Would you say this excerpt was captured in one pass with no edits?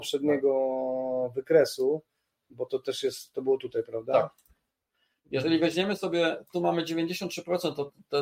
yes; 0 cuts

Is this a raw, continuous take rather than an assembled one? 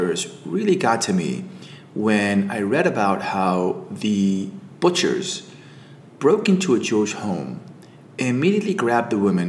yes; 0 cuts

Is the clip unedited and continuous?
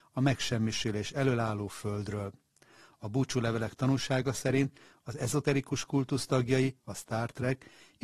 no; 1 cut; at 6.8 s

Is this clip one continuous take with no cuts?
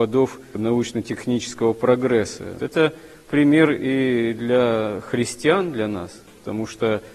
no; 1 cut; at 2.6 s

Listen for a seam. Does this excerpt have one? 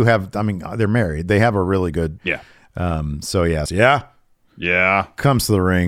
yes; 2 cuts; at 2.2 s, 3.7 s

